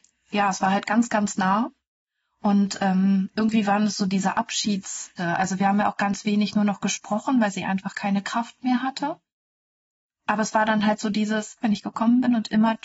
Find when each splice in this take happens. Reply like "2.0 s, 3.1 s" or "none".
5.2 s, 11.6 s

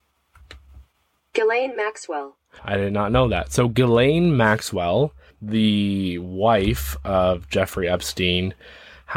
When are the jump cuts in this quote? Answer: 2.6 s

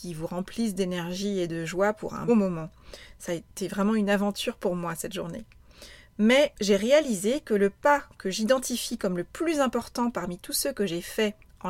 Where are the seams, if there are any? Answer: 2.3 s

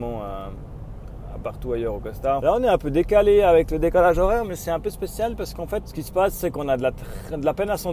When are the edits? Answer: 2.4 s, 5.8 s

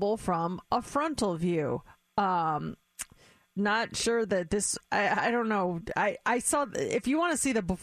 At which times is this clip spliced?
none

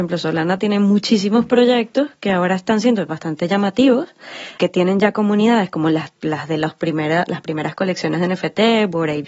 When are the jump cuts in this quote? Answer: 4.6 s

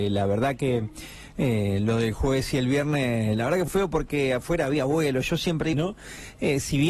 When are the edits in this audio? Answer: 3.7 s, 5.7 s

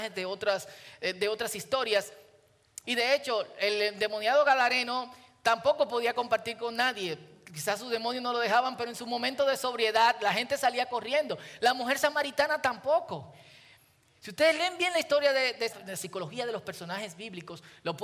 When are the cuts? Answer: 2.8 s, 14.2 s, 15.7 s

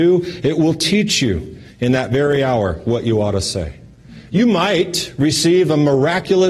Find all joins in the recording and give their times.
none

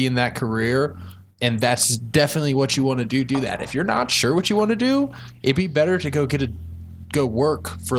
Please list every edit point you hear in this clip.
none

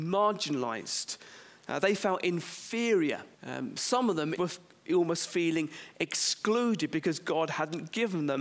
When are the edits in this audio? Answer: 3.3 s, 4.4 s

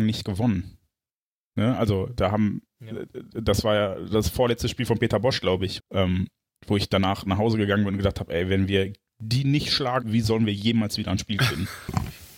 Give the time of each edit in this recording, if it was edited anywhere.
5.8 s, 10.0 s

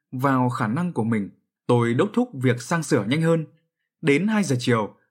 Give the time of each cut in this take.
1.6 s

